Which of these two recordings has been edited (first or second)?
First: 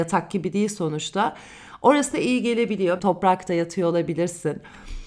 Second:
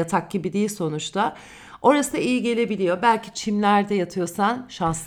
first